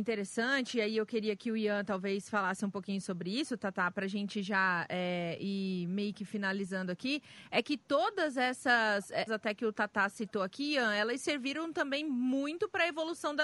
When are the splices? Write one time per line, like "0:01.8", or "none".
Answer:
0:09.3